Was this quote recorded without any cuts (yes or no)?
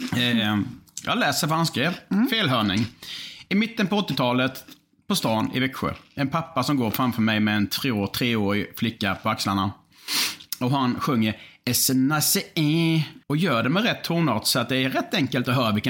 no